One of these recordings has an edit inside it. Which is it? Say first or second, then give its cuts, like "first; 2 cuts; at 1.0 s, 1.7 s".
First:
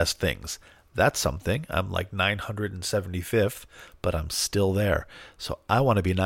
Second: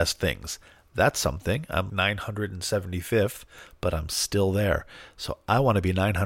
second; 1 cut; at 1.9 s